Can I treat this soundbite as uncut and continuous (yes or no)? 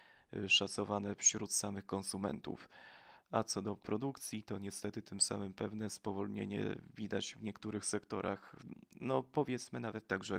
yes